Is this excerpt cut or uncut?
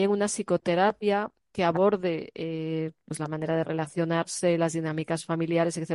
uncut